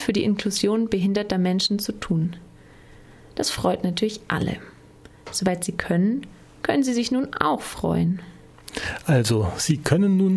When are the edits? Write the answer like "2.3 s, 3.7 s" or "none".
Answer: none